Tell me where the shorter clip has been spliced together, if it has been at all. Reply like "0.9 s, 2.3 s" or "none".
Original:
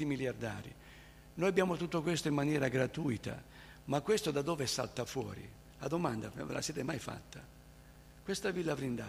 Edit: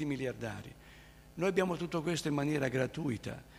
none